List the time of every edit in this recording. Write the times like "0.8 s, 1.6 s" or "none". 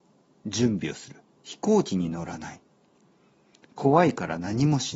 1.4 s